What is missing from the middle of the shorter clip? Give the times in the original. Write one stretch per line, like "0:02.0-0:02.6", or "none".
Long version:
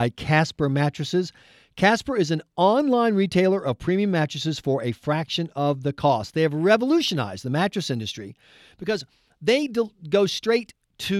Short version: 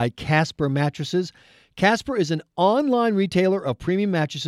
none